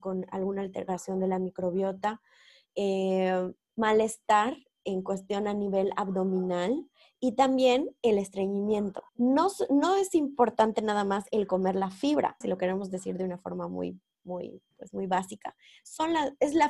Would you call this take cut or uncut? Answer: cut